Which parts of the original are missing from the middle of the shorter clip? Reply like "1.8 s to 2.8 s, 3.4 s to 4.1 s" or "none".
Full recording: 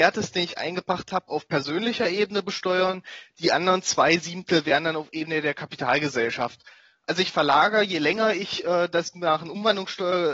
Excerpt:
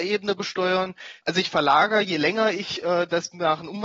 3.3 s to 7.0 s